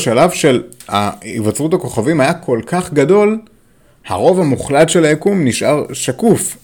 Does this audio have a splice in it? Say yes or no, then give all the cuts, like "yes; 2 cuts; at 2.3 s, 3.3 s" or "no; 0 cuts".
no; 0 cuts